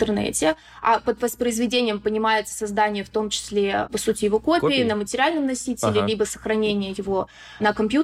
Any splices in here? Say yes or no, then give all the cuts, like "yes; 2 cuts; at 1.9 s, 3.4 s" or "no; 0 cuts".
yes; 1 cut; at 3.9 s